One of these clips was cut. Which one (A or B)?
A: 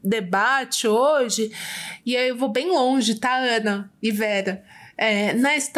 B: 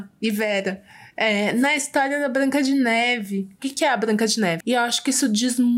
B